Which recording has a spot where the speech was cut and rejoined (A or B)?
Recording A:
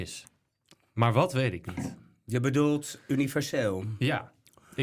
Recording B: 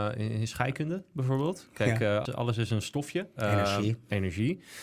B